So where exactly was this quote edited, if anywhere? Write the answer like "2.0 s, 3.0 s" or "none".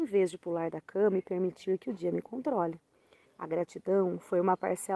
3.2 s